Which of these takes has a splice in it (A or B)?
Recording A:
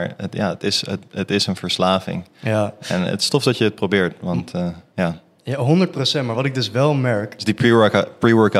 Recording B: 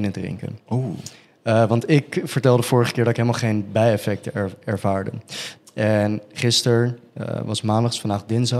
B